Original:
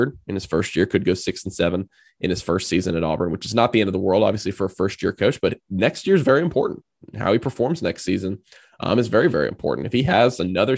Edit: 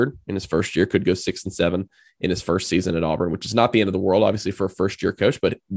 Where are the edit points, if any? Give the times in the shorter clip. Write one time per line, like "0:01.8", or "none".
none